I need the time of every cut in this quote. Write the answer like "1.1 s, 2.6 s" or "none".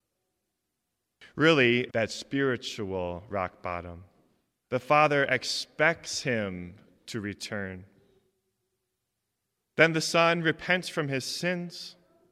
1.9 s, 4.6 s